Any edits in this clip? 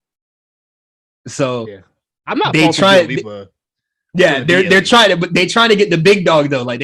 no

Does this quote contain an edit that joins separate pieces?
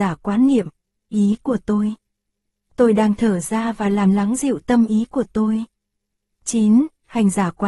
yes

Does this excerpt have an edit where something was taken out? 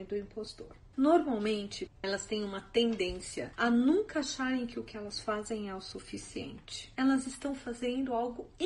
yes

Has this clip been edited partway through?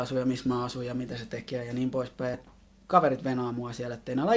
yes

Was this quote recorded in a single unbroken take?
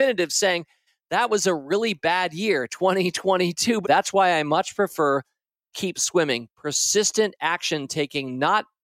no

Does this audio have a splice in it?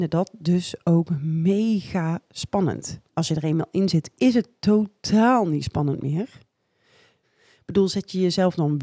yes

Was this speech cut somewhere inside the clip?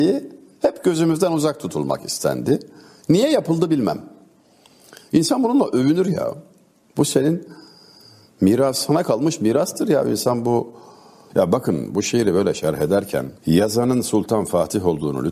yes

